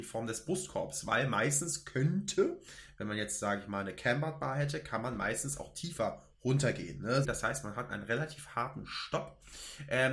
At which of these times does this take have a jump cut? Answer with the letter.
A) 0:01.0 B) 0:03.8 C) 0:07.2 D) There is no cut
C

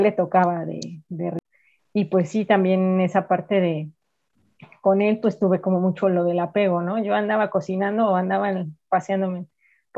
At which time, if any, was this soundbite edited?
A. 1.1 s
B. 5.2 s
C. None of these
C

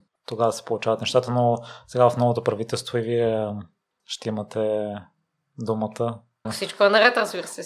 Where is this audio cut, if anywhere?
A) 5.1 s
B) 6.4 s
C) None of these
B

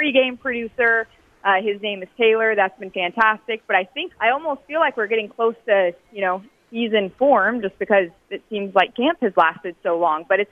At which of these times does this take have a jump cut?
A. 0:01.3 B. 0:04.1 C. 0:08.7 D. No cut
B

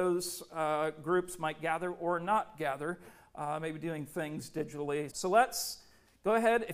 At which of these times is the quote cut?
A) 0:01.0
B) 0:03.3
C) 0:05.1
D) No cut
C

